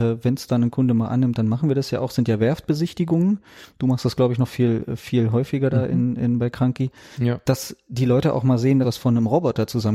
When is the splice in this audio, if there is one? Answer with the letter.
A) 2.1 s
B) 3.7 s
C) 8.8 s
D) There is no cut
C